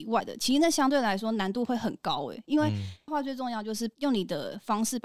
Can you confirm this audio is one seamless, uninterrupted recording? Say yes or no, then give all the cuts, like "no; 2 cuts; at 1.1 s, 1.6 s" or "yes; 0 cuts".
no; 1 cut; at 3.1 s